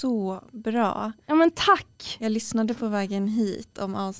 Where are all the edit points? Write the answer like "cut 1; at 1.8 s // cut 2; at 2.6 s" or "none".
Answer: none